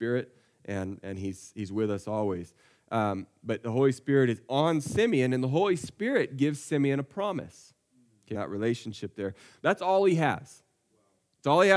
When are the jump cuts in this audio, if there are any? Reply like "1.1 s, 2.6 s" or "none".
8.3 s, 9.6 s